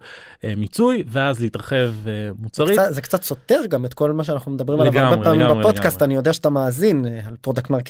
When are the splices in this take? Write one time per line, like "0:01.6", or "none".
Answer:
none